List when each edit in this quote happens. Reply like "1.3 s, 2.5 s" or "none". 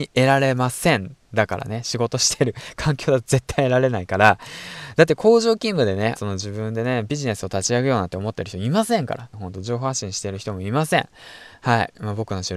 6.2 s, 9.3 s